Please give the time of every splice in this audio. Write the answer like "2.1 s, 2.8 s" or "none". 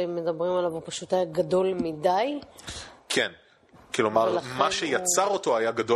none